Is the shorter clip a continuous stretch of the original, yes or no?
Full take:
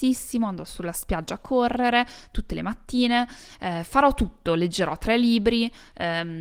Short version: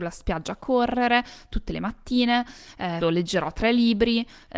no